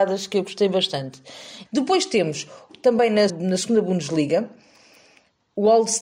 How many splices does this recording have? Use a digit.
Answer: 2